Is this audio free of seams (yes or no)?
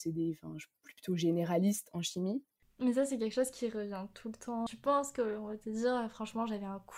no